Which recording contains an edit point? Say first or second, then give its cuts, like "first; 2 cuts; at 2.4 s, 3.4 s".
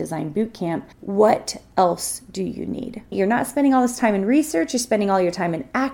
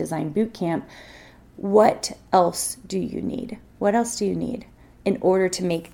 first; 2 cuts; at 0.9 s, 3.1 s